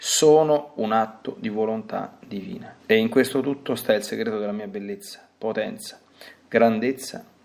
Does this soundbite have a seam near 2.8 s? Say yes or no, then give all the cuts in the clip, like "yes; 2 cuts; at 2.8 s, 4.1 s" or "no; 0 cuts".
yes; 1 cut; at 2.8 s